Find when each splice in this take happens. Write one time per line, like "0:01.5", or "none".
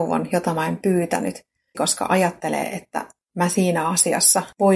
0:01.7